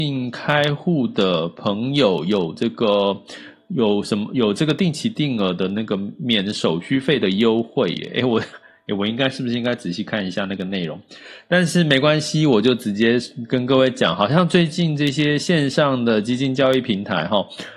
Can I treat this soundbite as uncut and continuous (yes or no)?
yes